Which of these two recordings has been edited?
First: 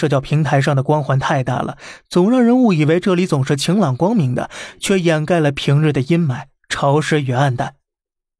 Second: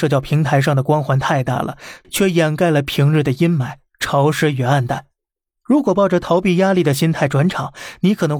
second; 2 cuts; at 2.0 s, 5.5 s

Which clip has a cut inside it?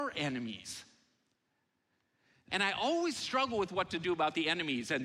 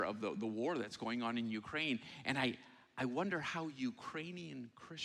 first; 1 cut; at 2.5 s

